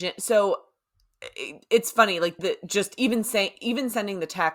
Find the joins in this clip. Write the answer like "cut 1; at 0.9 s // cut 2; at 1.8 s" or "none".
cut 1; at 2.4 s